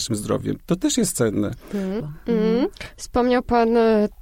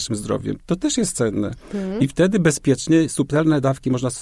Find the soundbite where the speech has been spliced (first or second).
first